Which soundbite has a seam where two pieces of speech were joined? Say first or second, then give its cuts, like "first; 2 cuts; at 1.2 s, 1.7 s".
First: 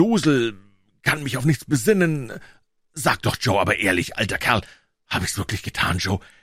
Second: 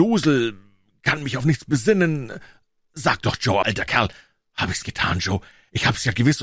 second; 2 cuts; at 3.6 s, 4.8 s